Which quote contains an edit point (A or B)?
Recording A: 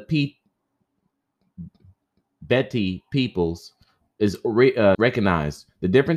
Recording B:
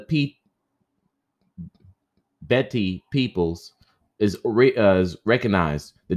A